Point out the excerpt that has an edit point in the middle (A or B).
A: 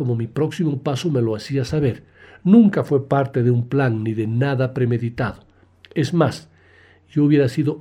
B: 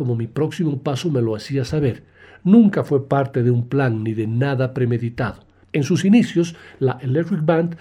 B